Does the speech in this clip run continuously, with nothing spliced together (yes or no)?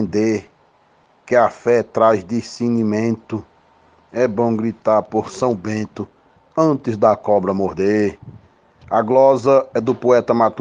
yes